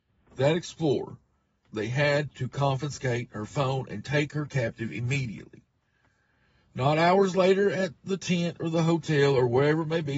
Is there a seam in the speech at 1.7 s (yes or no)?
yes